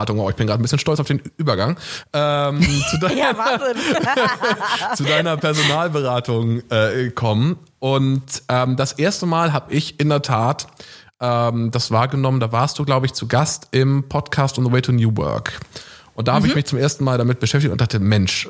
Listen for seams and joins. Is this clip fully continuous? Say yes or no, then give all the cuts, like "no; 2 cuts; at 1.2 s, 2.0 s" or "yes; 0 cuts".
yes; 0 cuts